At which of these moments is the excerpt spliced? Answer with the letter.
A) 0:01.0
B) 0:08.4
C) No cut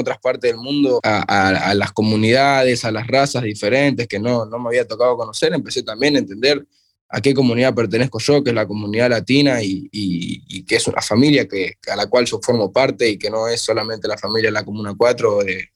C